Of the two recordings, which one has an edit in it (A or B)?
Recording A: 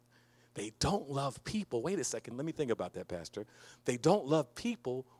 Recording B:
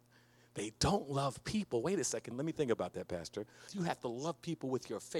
B